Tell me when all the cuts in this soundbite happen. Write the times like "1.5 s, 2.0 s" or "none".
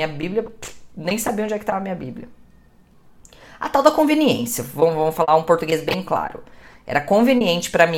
none